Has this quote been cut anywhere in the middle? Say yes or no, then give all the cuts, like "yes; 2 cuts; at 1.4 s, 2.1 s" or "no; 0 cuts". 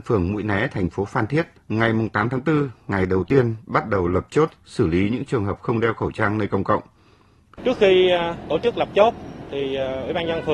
yes; 2 cuts; at 1.5 s, 7.5 s